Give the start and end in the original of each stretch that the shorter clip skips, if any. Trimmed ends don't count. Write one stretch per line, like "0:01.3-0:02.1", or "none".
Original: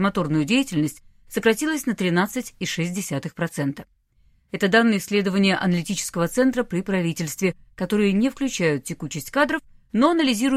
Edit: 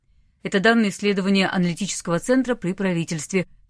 none